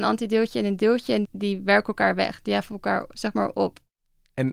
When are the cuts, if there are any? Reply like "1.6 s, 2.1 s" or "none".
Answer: 1.2 s